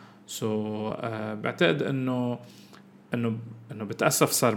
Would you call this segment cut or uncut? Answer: uncut